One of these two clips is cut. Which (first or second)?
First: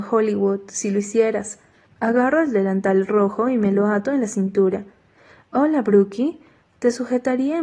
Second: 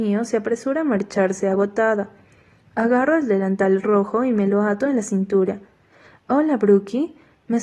first